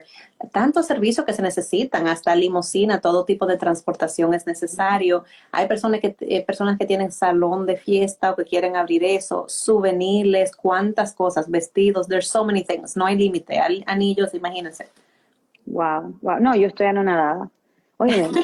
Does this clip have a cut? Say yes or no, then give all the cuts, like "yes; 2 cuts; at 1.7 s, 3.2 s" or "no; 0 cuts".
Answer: no; 0 cuts